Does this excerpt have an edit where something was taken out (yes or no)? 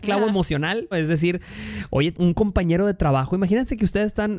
yes